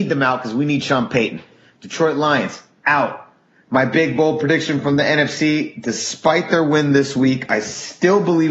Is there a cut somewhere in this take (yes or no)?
no